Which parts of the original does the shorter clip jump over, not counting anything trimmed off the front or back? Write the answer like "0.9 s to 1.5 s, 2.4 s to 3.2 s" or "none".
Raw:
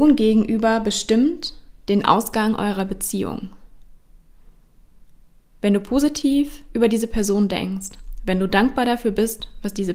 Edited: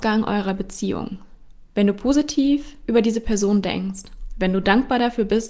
4.0 s to 5.6 s